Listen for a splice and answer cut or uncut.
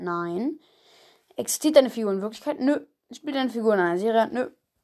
uncut